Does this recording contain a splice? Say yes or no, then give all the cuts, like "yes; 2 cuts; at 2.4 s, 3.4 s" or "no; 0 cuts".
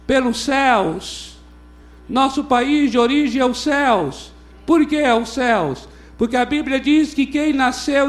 no; 0 cuts